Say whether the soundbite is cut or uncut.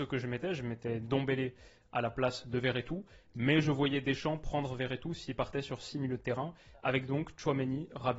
uncut